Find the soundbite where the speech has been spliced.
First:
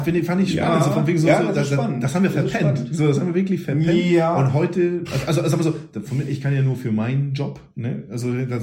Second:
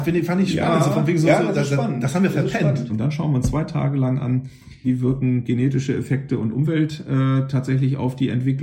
second; 2 cuts; at 2.9 s, 4.8 s

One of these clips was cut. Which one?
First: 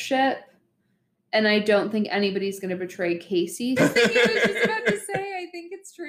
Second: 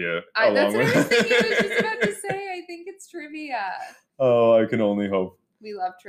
first; 1 cut; at 3.8 s

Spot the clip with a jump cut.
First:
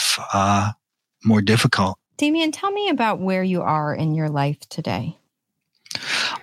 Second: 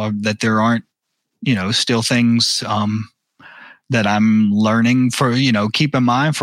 first; 1 cut; at 2.1 s

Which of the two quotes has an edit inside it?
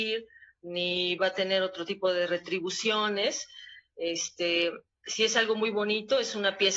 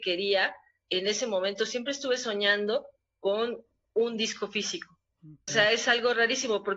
second; 1 cut; at 5.5 s

